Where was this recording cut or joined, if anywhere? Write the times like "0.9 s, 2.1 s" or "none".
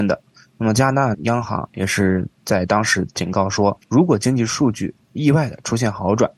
1.1 s, 3.8 s, 5.0 s